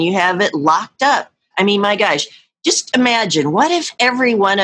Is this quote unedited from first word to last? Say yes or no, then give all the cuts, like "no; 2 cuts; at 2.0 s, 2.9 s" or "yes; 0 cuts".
no; 1 cut; at 1.5 s